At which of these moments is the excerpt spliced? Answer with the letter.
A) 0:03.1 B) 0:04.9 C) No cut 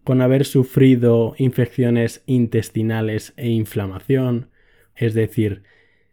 B